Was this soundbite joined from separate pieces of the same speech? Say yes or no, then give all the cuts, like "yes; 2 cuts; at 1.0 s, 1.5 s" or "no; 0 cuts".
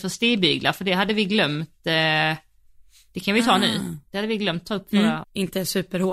yes; 1 cut; at 5.2 s